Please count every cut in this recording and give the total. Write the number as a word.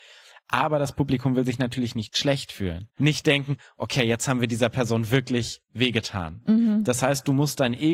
one